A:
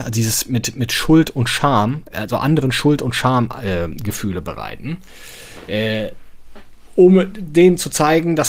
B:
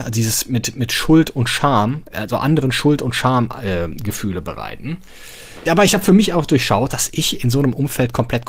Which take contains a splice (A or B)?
B